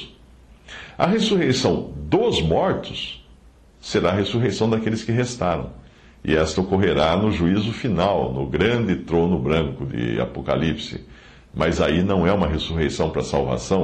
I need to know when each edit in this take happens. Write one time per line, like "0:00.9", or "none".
none